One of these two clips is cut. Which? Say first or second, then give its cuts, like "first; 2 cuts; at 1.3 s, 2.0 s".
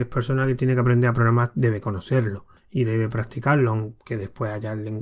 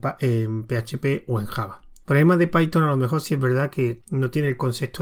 second; 2 cuts; at 2.0 s, 4.0 s